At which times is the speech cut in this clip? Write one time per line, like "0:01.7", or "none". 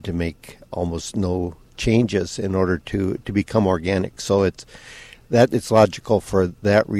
none